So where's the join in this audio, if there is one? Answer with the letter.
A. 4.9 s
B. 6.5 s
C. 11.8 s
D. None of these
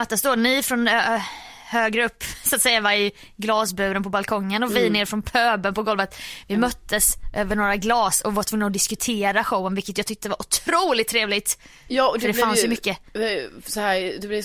D